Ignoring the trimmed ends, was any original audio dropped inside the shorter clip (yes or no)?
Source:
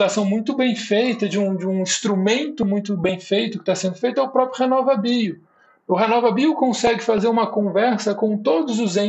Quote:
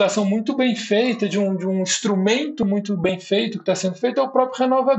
no